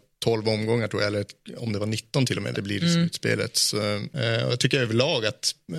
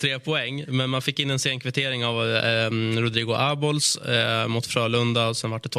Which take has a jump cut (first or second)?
first